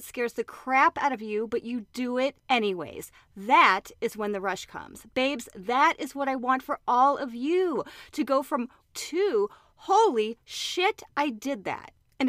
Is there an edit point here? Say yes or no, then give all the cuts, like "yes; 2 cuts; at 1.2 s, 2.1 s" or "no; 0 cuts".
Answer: yes; 1 cut; at 8.8 s